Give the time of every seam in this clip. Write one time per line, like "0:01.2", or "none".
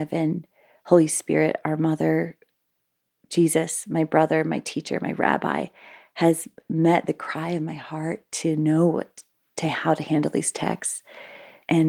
none